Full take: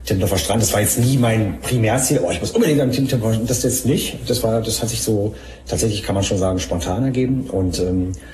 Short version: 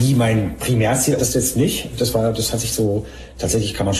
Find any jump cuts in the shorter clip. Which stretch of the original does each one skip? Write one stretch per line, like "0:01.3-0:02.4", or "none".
0:02.2-0:03.5